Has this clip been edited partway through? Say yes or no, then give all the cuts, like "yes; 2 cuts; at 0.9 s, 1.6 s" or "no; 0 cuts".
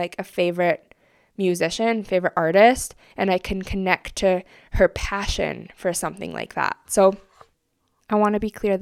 no; 0 cuts